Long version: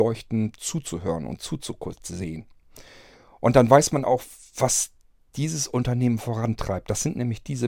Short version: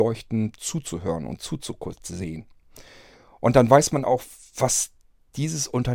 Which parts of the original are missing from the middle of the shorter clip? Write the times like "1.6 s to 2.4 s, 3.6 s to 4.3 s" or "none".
none